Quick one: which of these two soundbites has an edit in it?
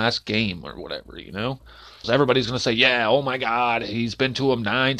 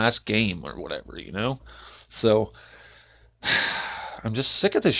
first; 1 cut; at 2.0 s

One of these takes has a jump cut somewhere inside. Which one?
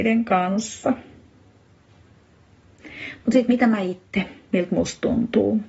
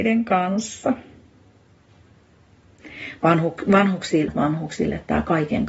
second; 2 cuts; at 3.2 s, 4.3 s

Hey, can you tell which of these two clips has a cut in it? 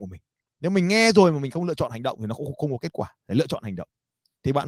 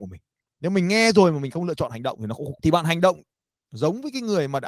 second; 1 cut; at 2.5 s

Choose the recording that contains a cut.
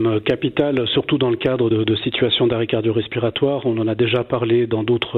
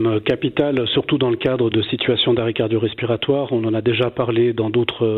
second; 1 cut; at 1.7 s

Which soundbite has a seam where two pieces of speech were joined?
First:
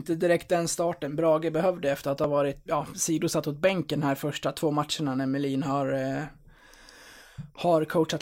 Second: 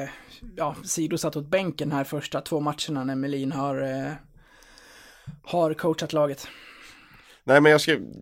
first; 1 cut; at 2.7 s

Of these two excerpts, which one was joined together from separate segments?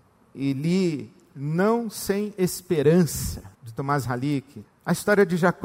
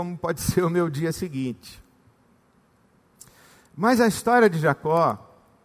first; 2 cuts; at 3.6 s, 4.6 s

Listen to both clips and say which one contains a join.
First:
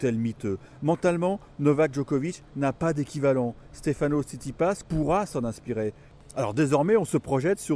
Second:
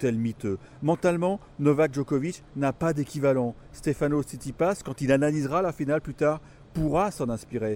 first; 1 cut; at 4.8 s

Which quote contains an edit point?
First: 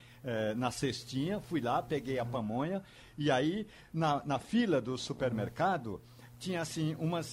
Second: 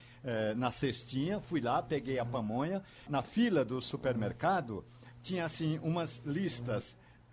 second; 1 cut; at 3.1 s

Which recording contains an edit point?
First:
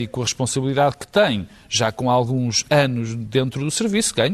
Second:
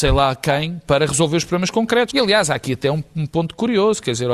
second; 1 cut; at 2.1 s

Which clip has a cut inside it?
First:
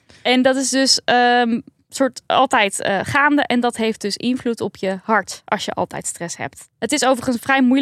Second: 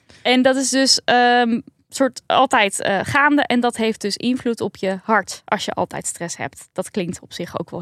first; 1 cut; at 6.7 s

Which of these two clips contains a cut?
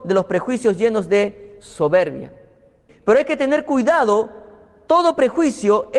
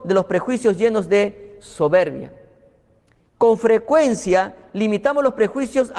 first; 1 cut; at 2.9 s

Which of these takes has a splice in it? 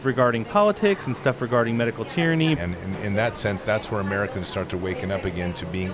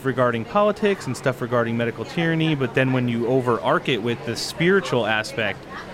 first; 2 cuts; at 2.6 s, 4.5 s

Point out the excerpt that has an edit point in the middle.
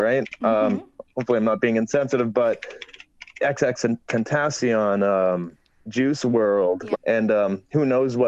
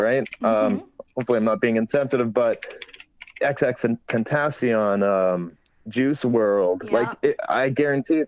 first; 1 cut; at 6.9 s

